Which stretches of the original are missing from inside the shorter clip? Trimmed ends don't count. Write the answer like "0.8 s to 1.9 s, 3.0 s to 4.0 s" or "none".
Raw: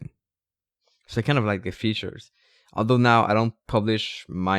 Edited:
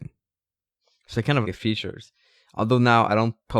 1.4 s to 1.6 s